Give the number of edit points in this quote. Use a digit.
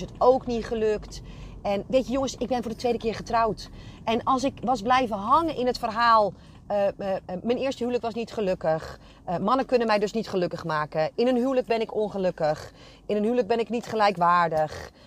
0